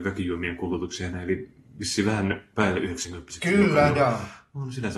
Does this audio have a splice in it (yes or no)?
yes